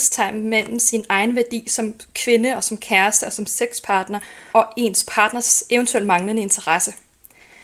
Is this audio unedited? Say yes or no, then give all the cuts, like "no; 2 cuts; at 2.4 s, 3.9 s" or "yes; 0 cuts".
no; 1 cut; at 4.5 s